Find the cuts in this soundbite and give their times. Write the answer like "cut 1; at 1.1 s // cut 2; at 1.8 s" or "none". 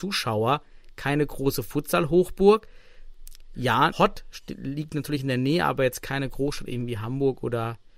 cut 1; at 3.9 s